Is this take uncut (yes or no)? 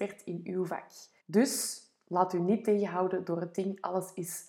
no